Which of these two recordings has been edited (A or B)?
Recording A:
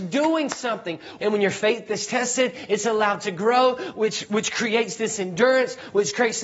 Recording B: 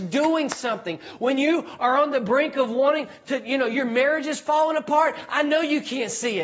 A